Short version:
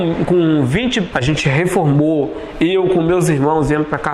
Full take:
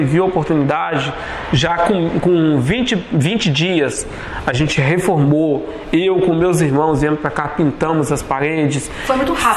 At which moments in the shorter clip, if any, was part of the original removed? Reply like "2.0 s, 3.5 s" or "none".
1.1 s